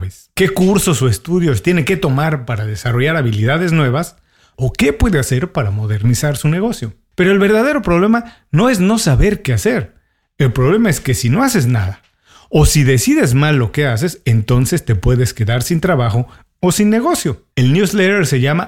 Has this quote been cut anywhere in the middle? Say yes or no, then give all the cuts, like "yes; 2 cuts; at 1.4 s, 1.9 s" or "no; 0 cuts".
yes; 1 cut; at 17.5 s